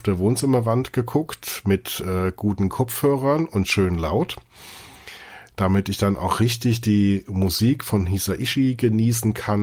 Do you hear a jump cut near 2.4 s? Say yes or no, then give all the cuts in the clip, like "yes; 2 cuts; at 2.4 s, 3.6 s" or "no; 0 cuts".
no; 0 cuts